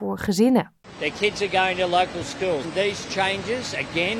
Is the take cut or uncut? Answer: cut